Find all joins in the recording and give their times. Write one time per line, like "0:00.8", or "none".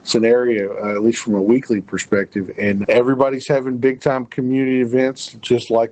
0:02.8

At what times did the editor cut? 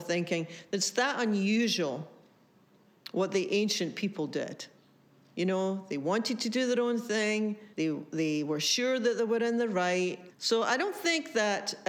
0:07.7
0:10.3

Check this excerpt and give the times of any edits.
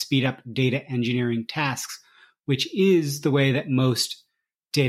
none

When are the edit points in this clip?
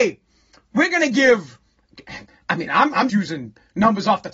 0:03.1

